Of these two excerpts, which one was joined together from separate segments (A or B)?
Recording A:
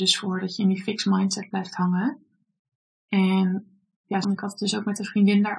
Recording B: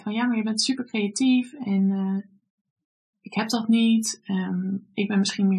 A